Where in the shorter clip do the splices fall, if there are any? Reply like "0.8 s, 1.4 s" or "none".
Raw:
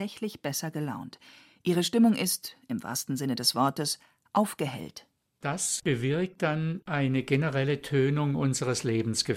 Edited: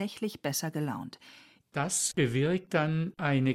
1.6 s